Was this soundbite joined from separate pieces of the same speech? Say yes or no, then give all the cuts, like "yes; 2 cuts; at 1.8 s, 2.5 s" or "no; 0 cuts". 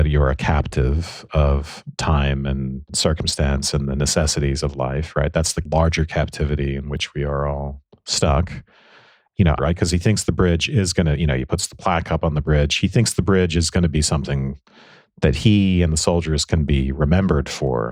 yes; 1 cut; at 9.6 s